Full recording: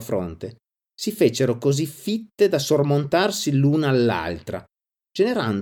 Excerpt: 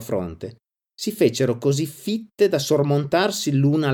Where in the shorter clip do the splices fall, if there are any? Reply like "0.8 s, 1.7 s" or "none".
none